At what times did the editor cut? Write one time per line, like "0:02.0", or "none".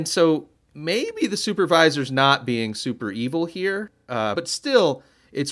0:04.3